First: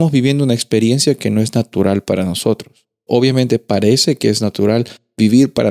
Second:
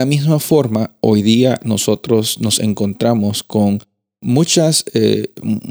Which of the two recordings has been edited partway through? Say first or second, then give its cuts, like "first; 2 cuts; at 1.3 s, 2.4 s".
first; 1 cut; at 3.1 s